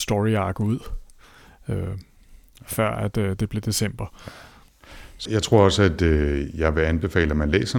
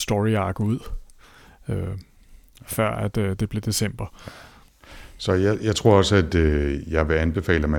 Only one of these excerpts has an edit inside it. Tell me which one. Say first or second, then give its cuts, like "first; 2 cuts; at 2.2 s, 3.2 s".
first; 1 cut; at 5.3 s